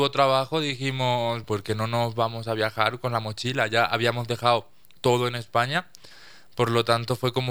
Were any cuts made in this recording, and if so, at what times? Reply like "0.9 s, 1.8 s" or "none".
1.4 s